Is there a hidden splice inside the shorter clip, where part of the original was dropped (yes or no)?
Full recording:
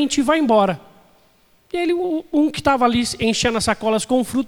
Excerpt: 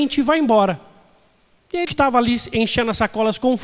yes